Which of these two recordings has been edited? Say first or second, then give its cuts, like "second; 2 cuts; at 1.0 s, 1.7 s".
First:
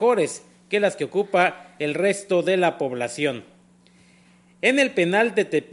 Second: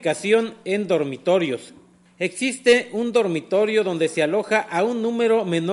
second; 1 cut; at 2.1 s